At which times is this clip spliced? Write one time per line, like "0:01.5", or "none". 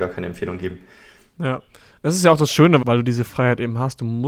0:02.8

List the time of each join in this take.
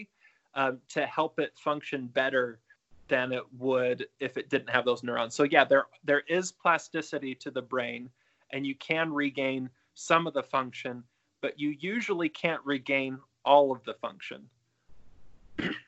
none

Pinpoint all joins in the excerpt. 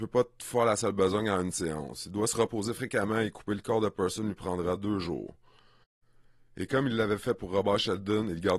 none

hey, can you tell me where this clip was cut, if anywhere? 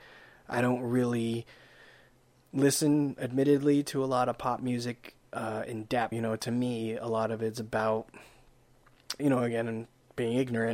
0:06.1
0:09.2

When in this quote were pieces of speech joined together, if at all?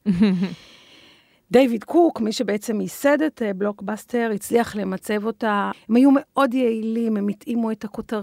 0:05.7

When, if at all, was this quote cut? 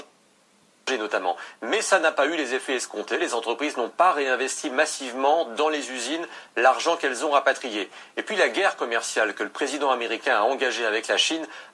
none

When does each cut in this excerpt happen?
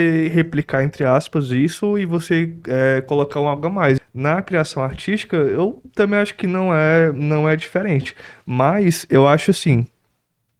0:04.0

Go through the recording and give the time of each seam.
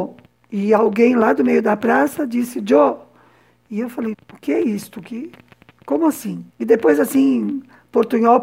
0:04.1
0:06.5

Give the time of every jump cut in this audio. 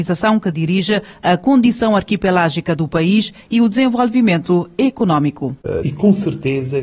0:05.8

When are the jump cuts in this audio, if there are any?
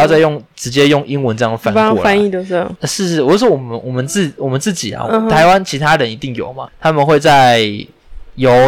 0:02.8
0:06.7

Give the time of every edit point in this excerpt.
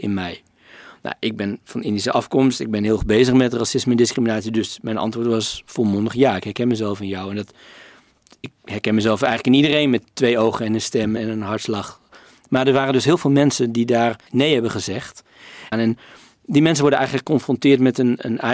0:11.2
0:14.3
0:15.7

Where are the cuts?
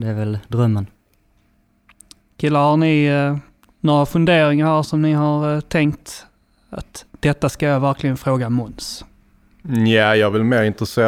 none

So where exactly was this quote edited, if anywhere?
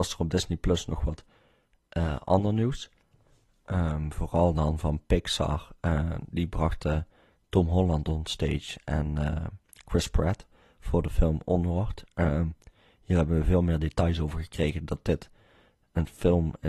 none

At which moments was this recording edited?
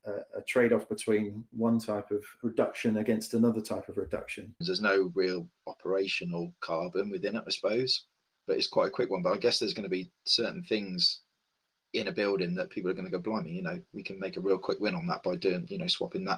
0:04.6

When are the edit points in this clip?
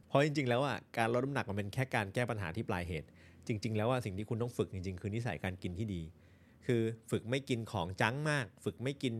none

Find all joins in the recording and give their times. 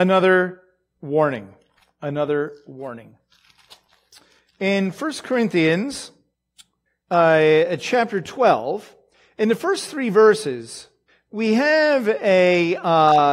none

